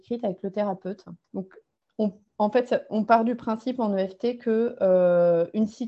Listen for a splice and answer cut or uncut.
cut